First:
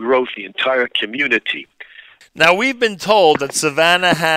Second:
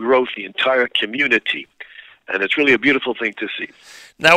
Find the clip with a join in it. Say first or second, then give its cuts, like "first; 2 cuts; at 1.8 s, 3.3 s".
first; 1 cut; at 2.2 s